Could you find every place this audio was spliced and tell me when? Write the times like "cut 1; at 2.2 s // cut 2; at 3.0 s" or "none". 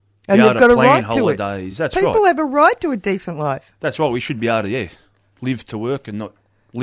none